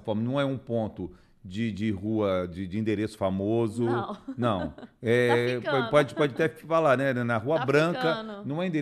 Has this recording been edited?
no; 0 cuts

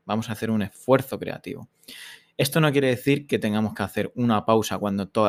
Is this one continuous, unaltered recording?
yes; 0 cuts

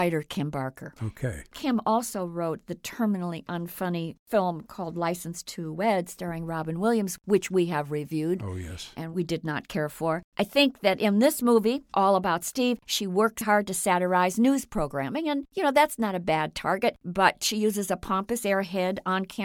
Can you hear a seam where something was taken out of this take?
yes; 1 cut; at 13.4 s

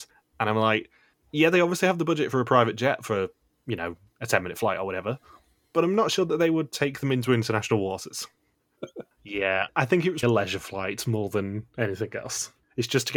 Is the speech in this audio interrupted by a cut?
yes; 2 cuts; at 8.8 s, 10.2 s

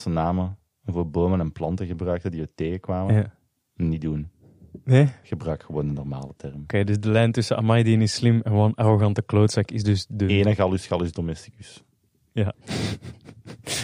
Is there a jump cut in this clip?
yes; 1 cut; at 12.5 s

